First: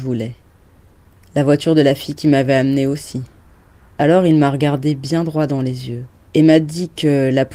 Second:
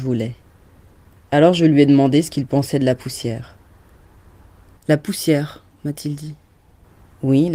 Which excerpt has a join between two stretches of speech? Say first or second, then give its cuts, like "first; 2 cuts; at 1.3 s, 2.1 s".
first; 2 cuts; at 1.2 s, 3.9 s